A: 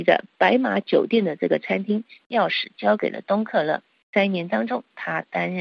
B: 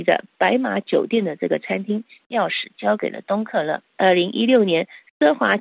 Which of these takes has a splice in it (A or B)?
B